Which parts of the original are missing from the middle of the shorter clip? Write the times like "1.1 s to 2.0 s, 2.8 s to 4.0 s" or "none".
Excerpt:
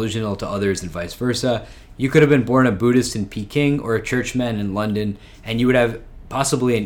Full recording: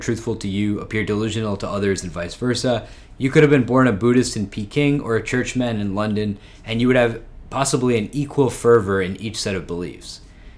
none